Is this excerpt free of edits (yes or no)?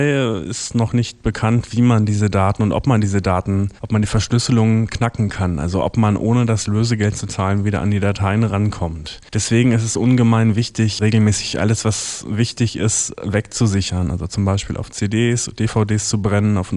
no